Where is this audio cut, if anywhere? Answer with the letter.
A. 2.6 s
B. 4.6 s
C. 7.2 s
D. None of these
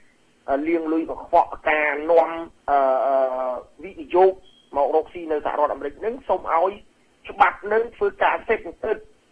A